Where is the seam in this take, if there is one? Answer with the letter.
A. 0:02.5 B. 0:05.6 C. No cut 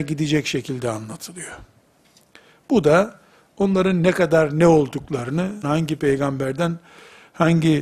B